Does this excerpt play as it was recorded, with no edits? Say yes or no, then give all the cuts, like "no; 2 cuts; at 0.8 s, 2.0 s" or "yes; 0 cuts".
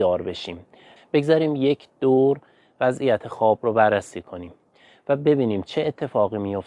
no; 1 cut; at 1.0 s